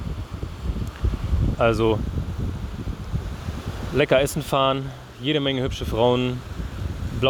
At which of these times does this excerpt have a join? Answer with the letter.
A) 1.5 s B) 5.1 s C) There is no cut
A